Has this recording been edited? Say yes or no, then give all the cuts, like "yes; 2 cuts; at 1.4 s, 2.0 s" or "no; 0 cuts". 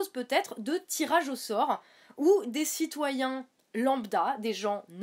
no; 0 cuts